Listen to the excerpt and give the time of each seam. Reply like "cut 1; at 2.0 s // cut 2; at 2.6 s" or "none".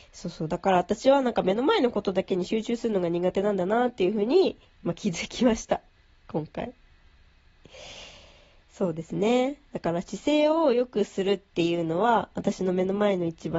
none